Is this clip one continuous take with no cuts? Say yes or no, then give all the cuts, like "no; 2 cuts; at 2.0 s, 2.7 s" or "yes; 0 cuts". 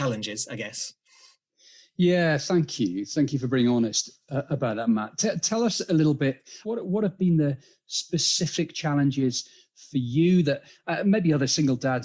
no; 1 cut; at 6.6 s